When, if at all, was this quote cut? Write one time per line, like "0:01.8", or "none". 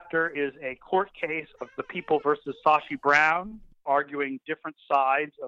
0:03.9